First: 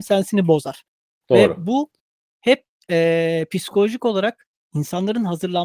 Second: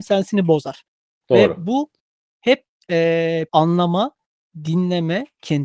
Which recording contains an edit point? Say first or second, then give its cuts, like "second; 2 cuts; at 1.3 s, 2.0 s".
second; 1 cut; at 3.5 s